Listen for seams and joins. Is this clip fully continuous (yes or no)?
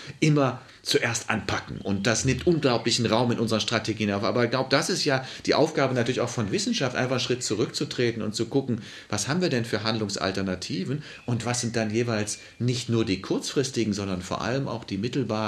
yes